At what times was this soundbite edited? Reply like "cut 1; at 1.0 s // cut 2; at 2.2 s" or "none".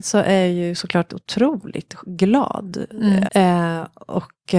cut 1; at 1.1 s // cut 2; at 3.2 s

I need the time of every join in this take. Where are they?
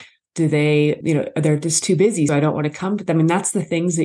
cut 1; at 1.0 s // cut 2; at 2.3 s

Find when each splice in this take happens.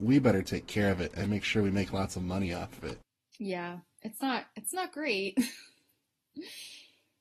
none

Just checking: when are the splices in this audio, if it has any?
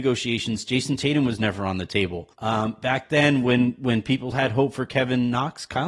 cut 1; at 2.3 s // cut 2; at 4.3 s

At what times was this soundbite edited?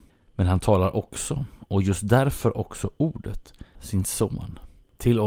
cut 1; at 3.7 s

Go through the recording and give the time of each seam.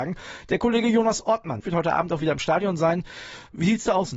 cut 1; at 1.6 s

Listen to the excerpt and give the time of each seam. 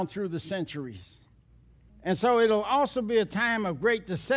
cut 1; at 1.9 s

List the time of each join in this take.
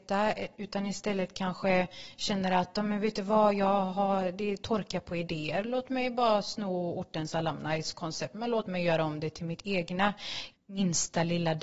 cut 1; at 10.5 s

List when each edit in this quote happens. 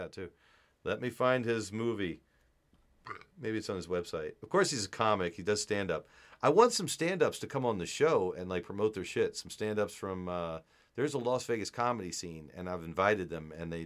none

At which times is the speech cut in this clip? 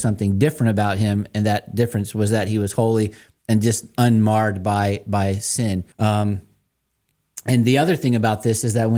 cut 1; at 5.9 s

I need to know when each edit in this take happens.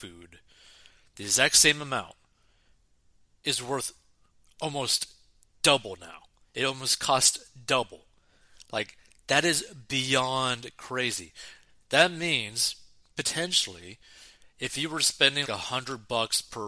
cut 1; at 15.4 s

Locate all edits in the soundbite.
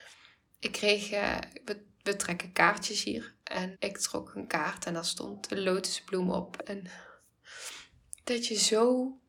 cut 1; at 3.7 s // cut 2; at 6.6 s

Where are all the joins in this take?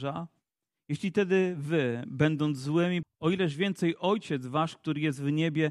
cut 1; at 3.0 s

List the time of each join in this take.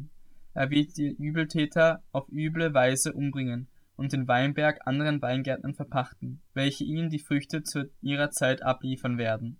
cut 1; at 6.5 s

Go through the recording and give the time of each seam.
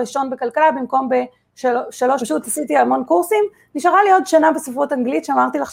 cut 1; at 2.2 s

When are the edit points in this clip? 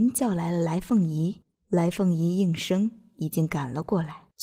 none

